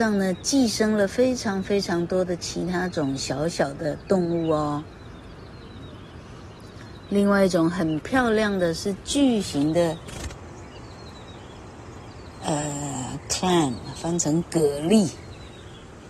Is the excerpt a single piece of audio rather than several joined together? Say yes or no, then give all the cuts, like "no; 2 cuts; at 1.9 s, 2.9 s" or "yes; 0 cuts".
yes; 0 cuts